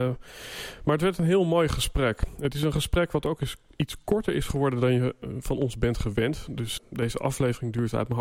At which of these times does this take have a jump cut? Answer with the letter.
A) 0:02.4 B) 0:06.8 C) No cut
B